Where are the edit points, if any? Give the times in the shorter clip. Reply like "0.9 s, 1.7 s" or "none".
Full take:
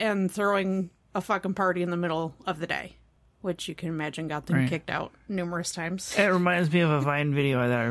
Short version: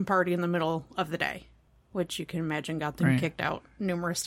none